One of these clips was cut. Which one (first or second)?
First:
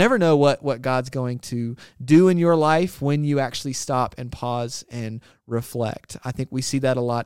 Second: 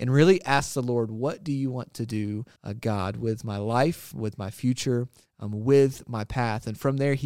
second